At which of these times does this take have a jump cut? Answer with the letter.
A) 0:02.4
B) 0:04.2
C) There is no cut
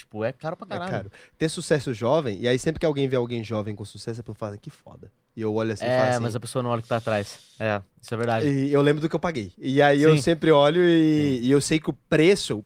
C